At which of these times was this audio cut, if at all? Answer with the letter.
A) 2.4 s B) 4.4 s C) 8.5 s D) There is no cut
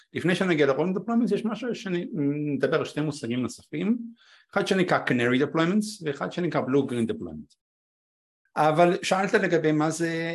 C